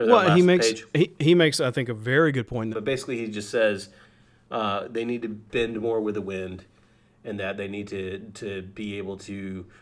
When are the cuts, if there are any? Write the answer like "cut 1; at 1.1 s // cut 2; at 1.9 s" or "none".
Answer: cut 1; at 2.7 s